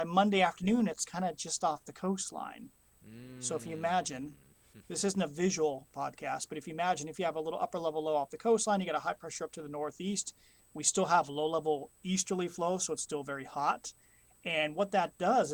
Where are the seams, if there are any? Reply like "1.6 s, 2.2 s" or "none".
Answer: none